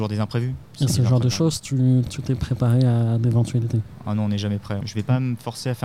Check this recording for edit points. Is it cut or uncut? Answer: cut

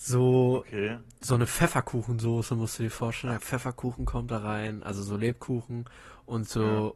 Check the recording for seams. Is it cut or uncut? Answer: cut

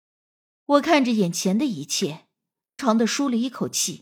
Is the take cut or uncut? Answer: cut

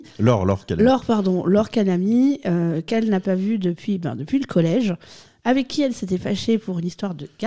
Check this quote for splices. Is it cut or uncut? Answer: uncut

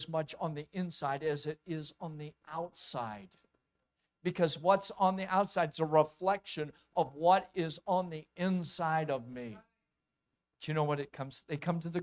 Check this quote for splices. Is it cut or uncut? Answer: cut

